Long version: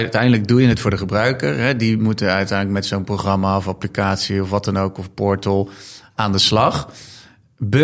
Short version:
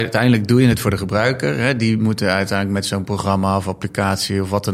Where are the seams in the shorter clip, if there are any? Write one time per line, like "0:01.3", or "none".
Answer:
none